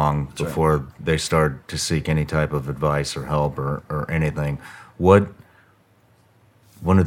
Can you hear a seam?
no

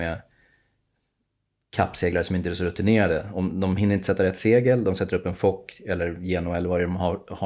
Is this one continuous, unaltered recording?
yes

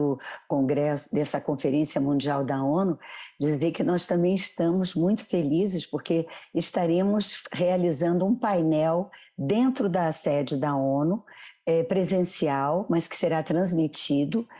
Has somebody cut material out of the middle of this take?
no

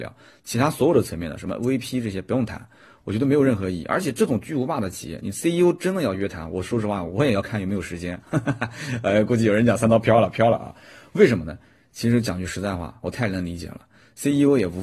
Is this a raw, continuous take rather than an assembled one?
yes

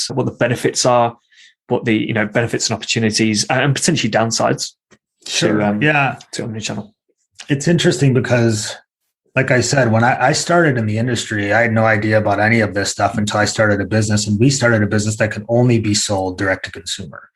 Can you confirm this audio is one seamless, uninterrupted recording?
yes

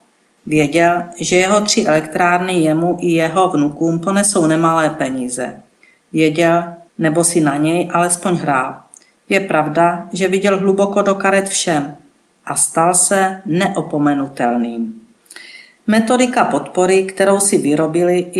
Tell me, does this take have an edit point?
yes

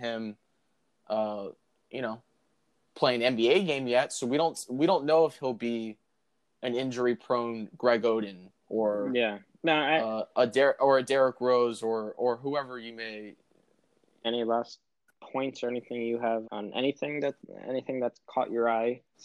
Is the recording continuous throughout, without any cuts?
no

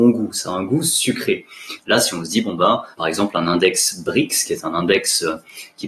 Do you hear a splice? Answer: yes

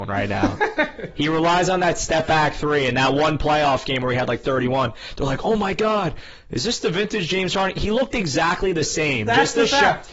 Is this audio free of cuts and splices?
yes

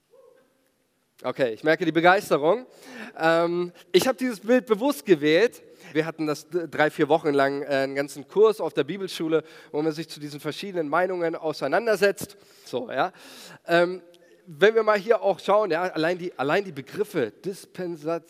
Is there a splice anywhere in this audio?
yes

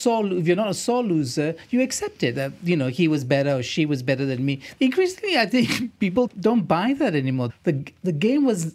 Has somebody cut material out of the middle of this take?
yes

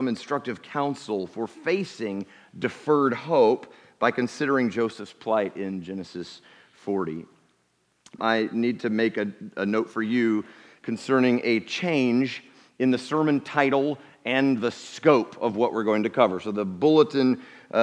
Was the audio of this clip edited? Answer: yes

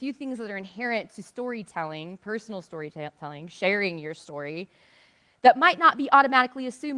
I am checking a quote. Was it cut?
no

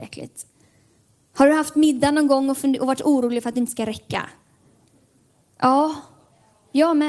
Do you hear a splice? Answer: no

